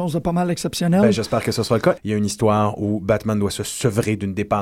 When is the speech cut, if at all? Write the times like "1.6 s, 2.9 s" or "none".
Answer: 2.0 s